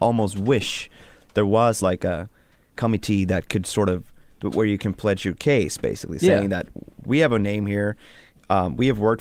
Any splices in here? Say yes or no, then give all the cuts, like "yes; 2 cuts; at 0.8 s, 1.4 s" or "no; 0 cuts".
no; 0 cuts